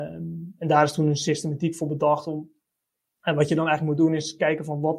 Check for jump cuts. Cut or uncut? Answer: uncut